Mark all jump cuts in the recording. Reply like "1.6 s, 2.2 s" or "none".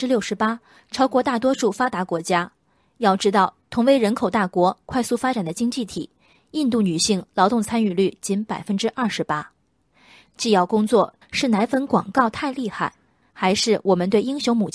11.2 s